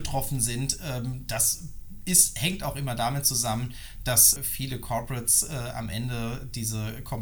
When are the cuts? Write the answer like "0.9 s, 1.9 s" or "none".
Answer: 4.4 s